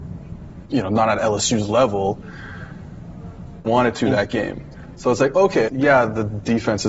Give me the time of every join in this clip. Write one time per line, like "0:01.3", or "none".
0:03.7
0:05.7